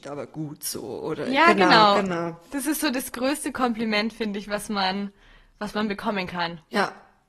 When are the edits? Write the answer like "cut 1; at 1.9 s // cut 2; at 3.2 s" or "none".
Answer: none